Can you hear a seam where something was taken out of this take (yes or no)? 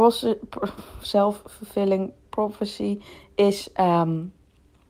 no